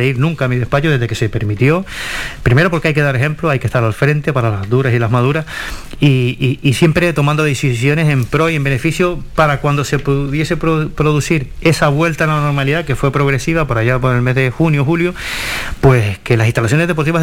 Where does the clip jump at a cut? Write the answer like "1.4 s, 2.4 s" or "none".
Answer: none